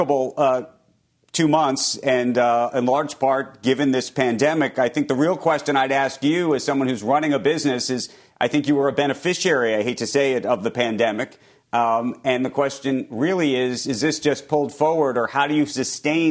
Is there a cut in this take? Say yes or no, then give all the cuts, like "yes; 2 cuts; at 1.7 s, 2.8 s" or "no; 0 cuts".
no; 0 cuts